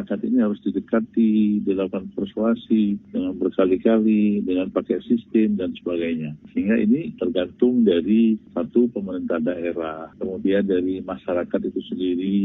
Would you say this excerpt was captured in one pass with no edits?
no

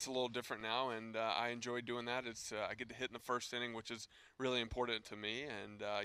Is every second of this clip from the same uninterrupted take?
yes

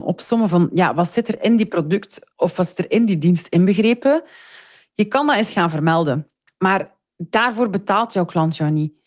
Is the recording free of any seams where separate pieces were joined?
no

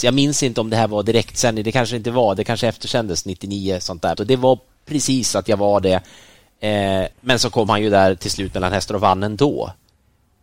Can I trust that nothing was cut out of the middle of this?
no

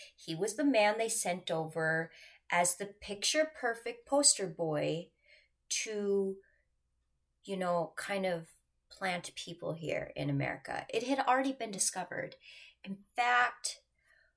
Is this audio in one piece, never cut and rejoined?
yes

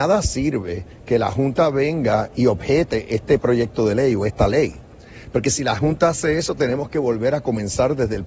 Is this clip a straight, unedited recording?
yes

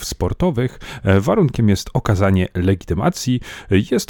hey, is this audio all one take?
yes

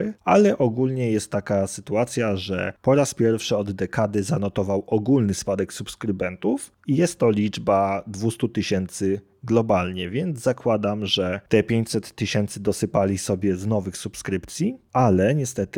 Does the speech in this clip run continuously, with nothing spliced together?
yes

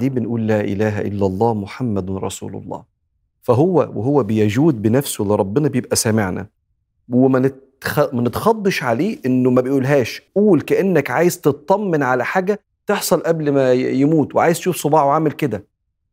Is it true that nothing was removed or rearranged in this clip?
no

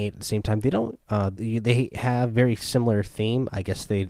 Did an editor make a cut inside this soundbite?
yes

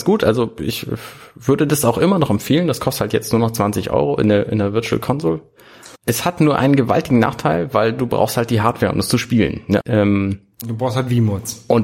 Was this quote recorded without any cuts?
no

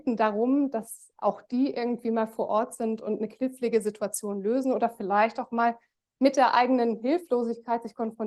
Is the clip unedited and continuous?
yes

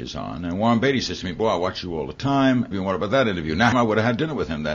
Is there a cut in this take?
yes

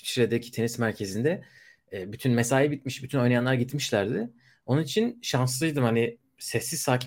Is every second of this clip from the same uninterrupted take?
yes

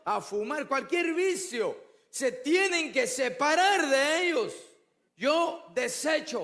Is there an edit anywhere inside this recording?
yes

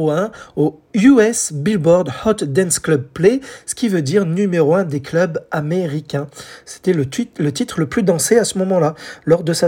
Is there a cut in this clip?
no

